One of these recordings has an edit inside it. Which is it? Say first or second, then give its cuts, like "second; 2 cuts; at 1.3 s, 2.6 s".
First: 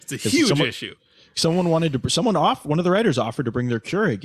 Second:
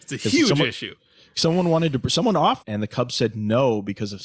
second; 1 cut; at 2.6 s